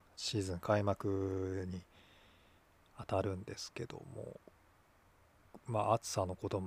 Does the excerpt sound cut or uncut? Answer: uncut